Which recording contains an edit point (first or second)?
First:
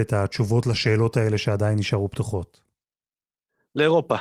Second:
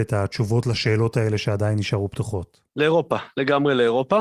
second